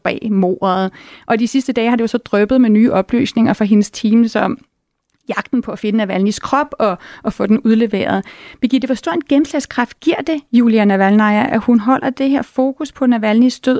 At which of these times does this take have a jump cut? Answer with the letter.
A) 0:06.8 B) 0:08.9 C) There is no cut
C